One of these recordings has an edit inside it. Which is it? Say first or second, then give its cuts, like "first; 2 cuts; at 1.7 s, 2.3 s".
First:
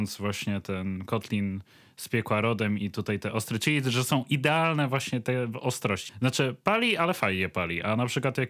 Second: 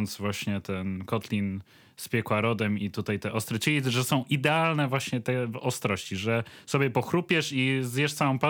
first; 1 cut; at 6.1 s